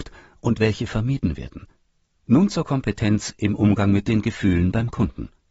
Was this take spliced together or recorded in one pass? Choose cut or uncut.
cut